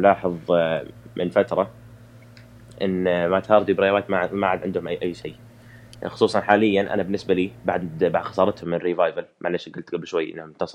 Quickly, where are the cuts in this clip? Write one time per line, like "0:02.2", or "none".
none